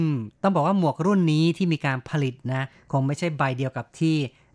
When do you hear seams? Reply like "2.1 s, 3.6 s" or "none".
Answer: none